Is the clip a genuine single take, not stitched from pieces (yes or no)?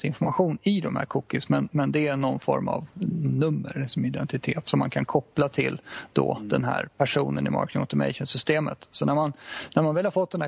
yes